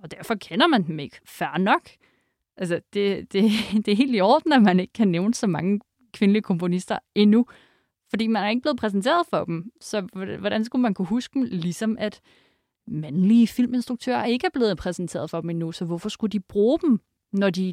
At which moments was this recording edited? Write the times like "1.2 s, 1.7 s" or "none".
none